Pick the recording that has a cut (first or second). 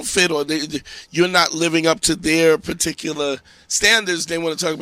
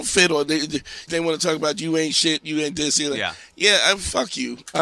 second